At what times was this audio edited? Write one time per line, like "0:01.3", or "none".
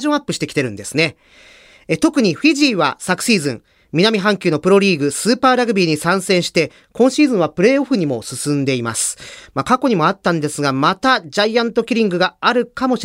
none